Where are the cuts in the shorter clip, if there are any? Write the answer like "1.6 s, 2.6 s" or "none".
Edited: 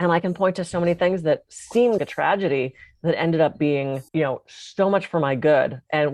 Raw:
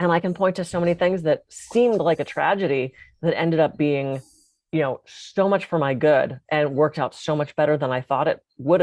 2.0 s, 4.1 s